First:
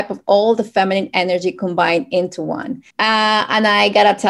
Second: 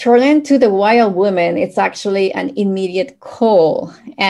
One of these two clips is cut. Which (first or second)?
first